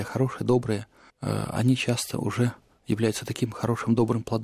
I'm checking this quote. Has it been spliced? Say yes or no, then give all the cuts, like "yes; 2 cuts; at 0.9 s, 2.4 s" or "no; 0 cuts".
yes; 1 cut; at 2.7 s